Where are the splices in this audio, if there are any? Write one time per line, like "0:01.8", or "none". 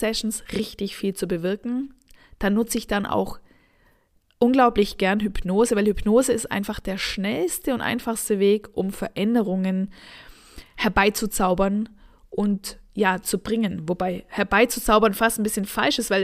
none